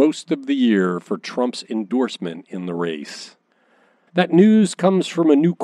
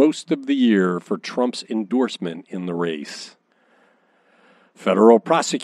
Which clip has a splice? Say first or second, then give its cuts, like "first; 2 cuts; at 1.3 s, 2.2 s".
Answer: first; 1 cut; at 4.1 s